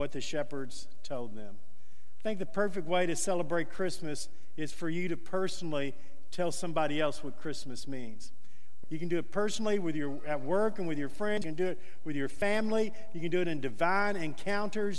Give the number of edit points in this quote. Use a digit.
1